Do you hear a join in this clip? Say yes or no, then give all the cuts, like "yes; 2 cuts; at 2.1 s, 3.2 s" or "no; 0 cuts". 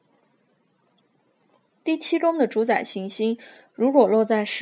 yes; 1 cut; at 1.7 s